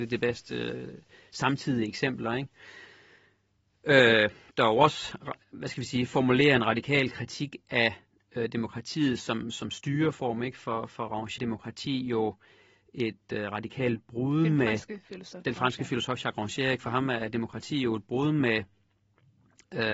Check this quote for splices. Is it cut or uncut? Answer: cut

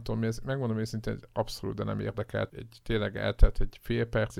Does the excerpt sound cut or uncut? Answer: cut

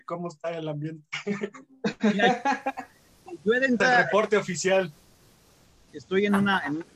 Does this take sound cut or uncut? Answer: cut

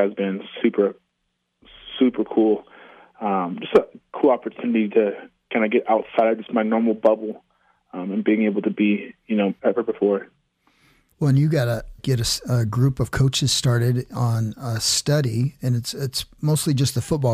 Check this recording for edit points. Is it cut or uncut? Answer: cut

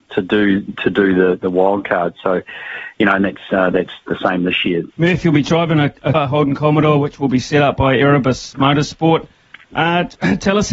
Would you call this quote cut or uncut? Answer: cut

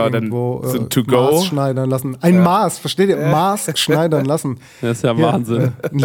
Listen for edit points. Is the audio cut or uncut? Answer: uncut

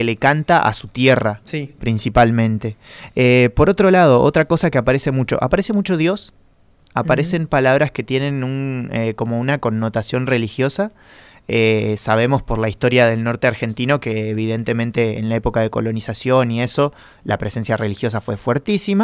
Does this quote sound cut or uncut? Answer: uncut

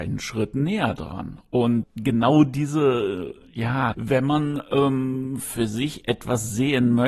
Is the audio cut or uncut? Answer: cut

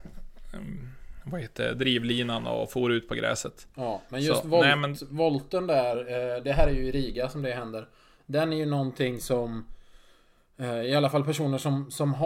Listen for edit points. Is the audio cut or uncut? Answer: uncut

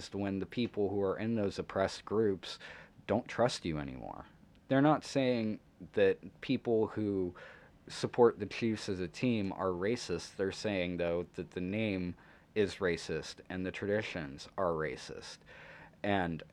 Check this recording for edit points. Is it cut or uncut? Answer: uncut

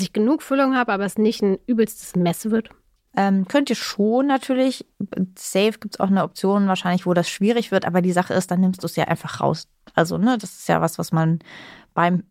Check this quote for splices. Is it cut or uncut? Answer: uncut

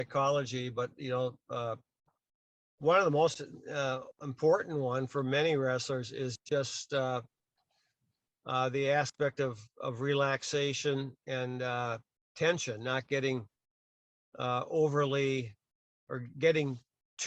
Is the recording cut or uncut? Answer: uncut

